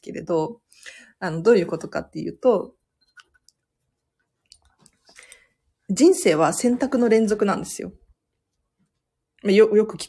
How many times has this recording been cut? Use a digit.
0